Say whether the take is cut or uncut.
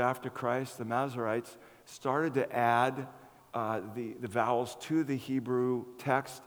uncut